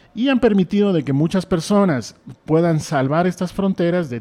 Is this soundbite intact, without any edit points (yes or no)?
yes